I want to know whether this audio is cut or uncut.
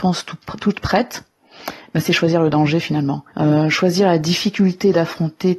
cut